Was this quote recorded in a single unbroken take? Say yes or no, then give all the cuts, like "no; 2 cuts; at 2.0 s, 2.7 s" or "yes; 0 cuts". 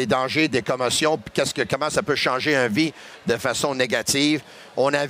yes; 0 cuts